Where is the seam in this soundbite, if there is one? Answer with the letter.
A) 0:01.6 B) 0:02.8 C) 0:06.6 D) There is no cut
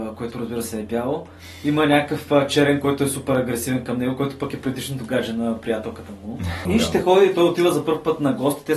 C